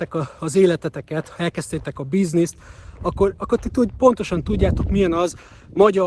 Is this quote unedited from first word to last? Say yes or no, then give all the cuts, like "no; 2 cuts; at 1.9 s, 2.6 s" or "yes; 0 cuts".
yes; 0 cuts